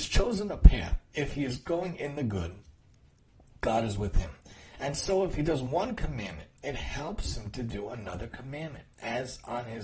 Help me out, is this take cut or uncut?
uncut